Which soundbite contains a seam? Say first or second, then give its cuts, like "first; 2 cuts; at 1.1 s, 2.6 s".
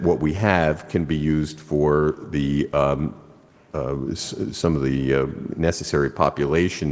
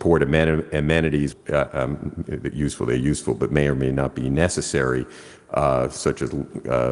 second; 1 cut; at 1.3 s